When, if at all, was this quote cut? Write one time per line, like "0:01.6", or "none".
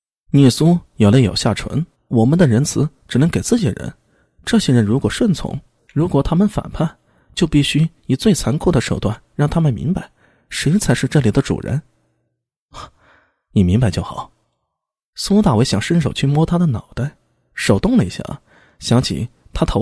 0:01.9
0:05.8